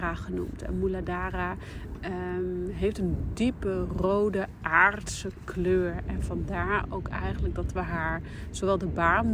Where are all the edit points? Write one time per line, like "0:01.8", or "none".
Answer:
none